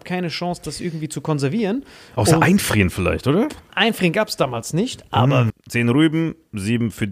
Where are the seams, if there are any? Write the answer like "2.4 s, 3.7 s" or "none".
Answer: 5.5 s

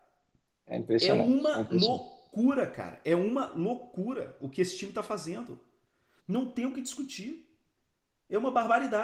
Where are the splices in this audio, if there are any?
6.2 s

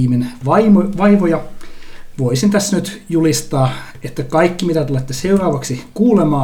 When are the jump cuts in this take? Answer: none

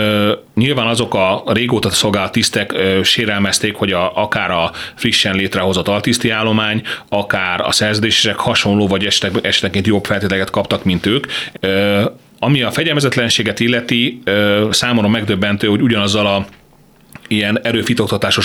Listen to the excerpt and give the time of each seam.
11.5 s, 14.7 s

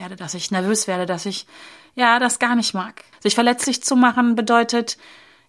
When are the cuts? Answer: 3.1 s

